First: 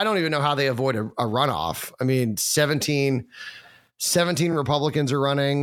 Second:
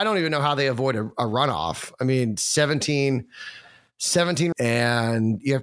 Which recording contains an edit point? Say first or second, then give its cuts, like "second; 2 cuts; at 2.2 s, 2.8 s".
second; 1 cut; at 4.5 s